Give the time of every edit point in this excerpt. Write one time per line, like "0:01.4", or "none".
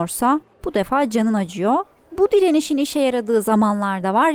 0:02.1